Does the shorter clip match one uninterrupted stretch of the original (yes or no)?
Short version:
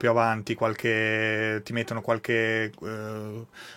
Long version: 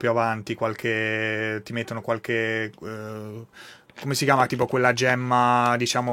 yes